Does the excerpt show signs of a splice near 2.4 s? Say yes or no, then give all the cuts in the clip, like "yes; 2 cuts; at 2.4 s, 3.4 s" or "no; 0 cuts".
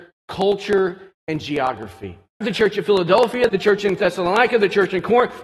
yes; 2 cuts; at 2.4 s, 3.5 s